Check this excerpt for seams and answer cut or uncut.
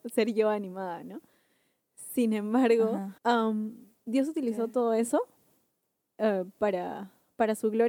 cut